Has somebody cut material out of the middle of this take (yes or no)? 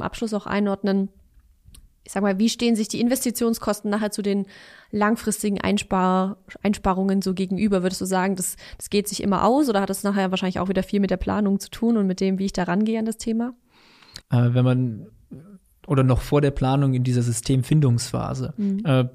yes